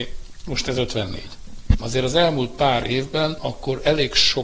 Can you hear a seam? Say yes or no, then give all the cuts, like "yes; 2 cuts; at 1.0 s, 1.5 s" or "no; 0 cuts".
yes; 2 cuts; at 1.8 s, 3.4 s